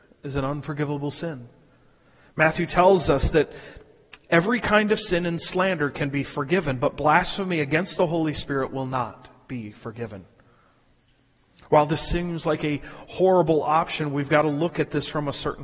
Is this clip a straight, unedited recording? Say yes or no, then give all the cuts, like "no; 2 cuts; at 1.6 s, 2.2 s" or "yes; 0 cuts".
yes; 0 cuts